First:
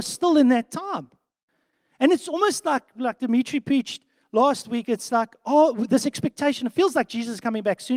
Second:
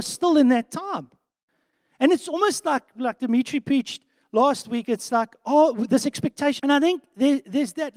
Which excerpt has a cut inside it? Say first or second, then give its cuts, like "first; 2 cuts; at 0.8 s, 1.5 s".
second; 1 cut; at 6.6 s